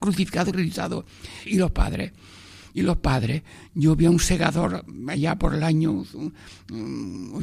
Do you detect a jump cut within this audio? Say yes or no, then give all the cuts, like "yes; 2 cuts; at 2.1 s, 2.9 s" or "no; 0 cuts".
yes; 1 cut; at 1.5 s